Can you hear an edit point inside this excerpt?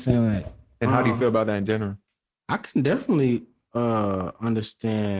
no; 0 cuts

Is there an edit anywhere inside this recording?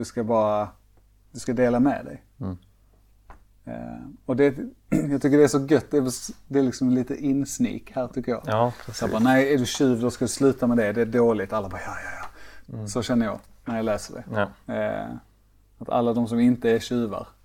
yes; 1 cut; at 12.6 s

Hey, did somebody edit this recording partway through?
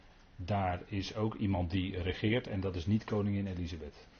no; 0 cuts

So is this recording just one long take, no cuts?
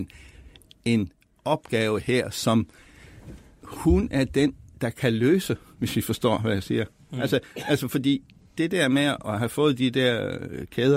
yes; 0 cuts

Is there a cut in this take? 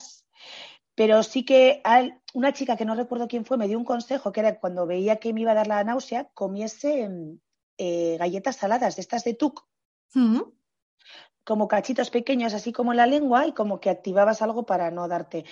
no; 0 cuts

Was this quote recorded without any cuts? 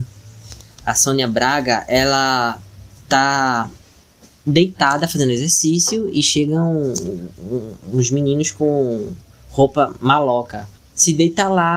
no; 1 cut; at 10.8 s

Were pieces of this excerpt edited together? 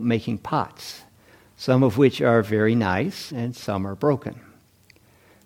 yes; 1 cut; at 3.3 s

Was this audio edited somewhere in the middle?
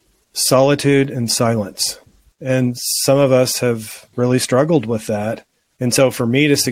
yes; 1 cut; at 2.3 s

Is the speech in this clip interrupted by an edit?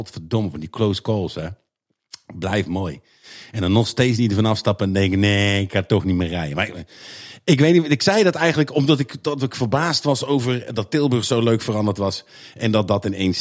no; 0 cuts

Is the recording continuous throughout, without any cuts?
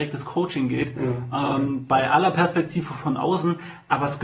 yes; 0 cuts

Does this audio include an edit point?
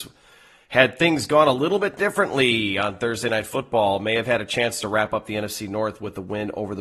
no; 0 cuts

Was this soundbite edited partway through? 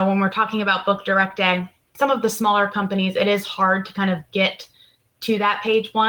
no; 0 cuts

